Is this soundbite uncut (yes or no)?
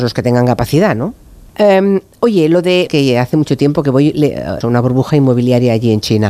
no